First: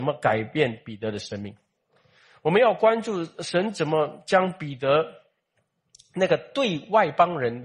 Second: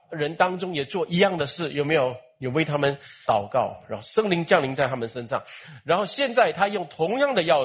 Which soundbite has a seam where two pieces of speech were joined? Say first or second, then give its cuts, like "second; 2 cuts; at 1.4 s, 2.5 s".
second; 1 cut; at 3.3 s